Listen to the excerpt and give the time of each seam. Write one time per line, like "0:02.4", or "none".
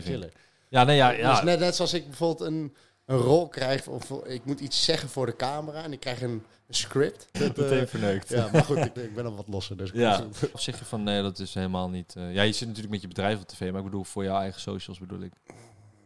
0:07.3
0:09.0
0:10.5